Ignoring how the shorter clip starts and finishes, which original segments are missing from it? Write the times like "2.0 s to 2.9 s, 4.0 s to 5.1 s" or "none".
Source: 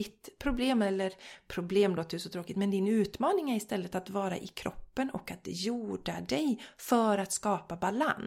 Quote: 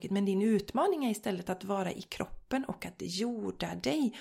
none